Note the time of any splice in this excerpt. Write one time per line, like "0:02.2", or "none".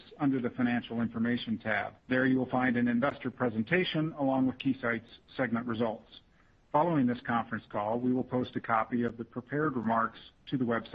0:02.0